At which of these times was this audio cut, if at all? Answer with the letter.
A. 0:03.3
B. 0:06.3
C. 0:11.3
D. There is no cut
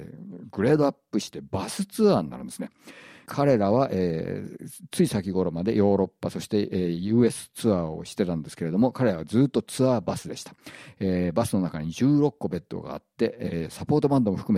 A